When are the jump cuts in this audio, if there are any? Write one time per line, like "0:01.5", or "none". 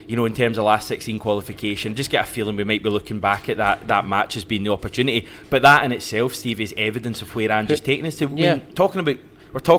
none

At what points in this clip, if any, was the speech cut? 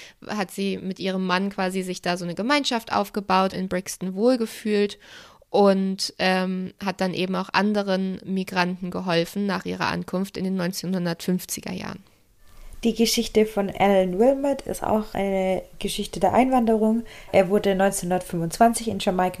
0:03.5

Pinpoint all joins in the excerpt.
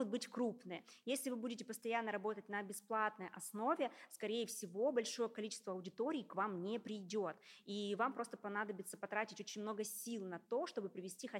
none

